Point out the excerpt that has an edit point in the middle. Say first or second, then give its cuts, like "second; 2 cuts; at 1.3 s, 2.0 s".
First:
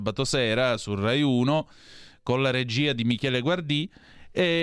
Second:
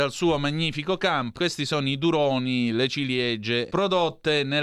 second; 2 cuts; at 1.3 s, 3.7 s